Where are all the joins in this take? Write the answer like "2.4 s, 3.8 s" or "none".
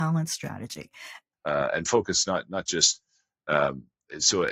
1.3 s